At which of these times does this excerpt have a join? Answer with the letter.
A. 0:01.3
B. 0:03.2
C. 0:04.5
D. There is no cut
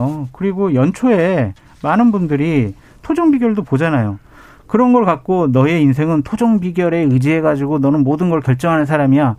D